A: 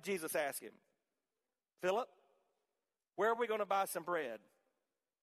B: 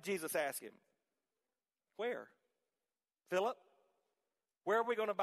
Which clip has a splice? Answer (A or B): A